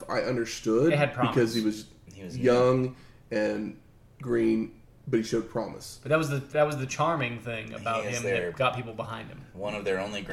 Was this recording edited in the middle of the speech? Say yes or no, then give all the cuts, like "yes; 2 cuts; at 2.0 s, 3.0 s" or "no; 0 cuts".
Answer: no; 0 cuts